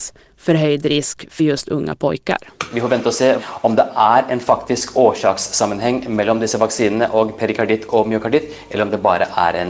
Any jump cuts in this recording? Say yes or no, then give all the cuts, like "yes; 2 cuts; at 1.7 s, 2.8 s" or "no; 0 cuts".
no; 0 cuts